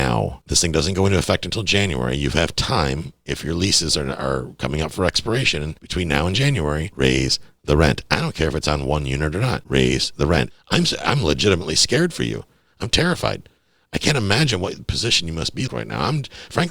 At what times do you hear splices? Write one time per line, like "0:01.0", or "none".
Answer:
0:10.5
0:15.7